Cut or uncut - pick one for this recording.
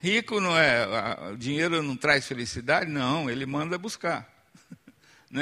uncut